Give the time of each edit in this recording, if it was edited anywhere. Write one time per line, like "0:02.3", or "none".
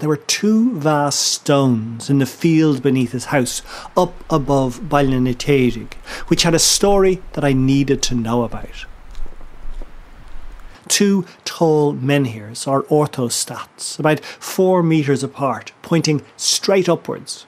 0:10.7